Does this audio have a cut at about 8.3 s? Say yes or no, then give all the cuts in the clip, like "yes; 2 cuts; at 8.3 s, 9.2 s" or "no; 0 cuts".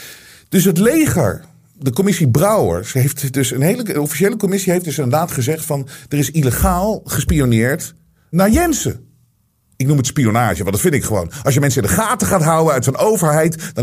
yes; 1 cut; at 8.3 s